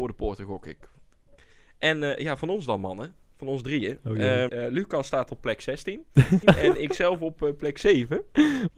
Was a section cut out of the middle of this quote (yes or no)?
yes